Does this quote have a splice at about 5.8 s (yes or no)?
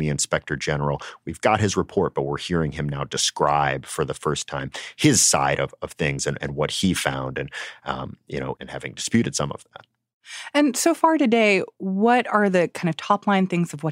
no